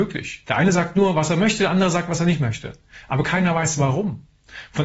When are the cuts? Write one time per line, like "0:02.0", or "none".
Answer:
none